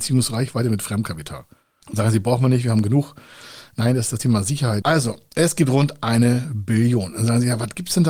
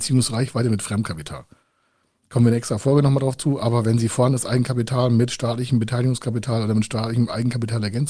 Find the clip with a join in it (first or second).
first